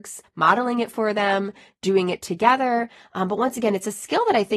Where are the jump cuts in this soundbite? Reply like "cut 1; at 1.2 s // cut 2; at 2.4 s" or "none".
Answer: none